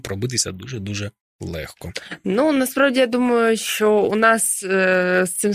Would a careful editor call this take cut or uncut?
uncut